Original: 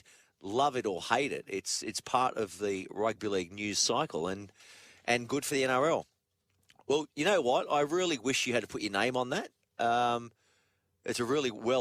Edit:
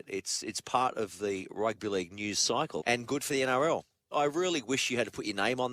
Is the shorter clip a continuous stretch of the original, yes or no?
no